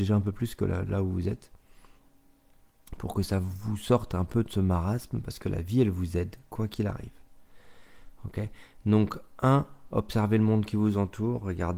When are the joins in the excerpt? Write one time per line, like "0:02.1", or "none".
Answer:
none